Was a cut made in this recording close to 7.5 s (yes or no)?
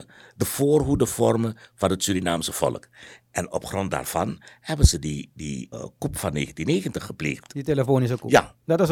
no